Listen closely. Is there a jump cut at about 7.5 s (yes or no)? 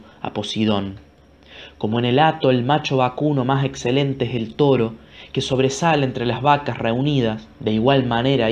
yes